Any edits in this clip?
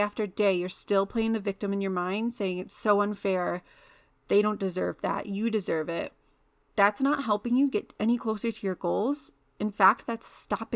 no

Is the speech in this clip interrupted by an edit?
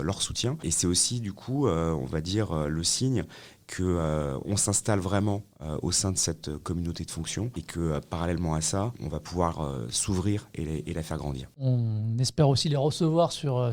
no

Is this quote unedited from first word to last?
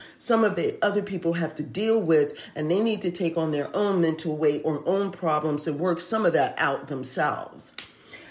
yes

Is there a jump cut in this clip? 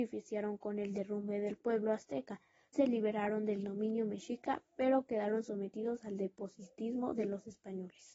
yes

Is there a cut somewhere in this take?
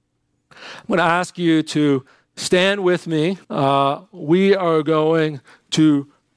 yes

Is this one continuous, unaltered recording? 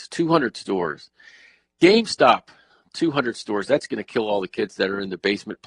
yes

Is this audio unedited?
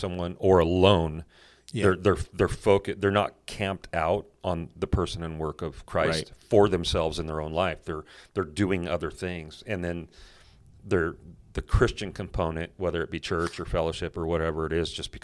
yes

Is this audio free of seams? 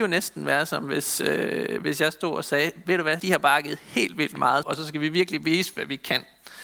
no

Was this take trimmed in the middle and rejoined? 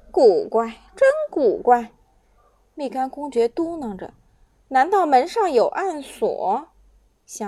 no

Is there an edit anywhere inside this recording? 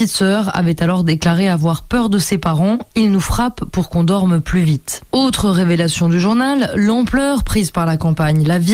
no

